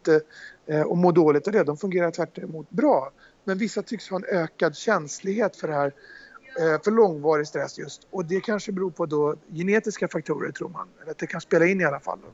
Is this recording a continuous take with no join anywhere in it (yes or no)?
yes